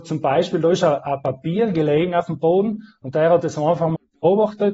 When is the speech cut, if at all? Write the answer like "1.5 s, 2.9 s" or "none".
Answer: none